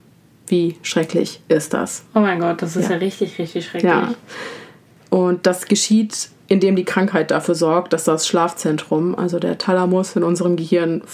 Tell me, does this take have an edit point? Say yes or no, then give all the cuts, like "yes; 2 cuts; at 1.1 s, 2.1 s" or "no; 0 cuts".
no; 0 cuts